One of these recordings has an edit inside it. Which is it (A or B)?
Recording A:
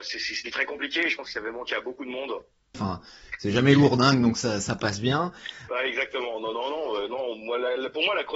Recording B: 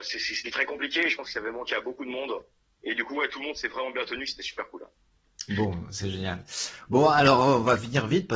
A